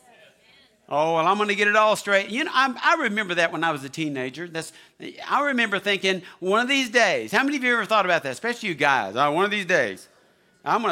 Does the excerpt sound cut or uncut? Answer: uncut